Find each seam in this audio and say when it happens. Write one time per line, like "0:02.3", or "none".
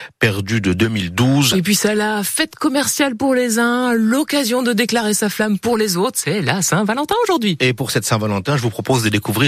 0:01.5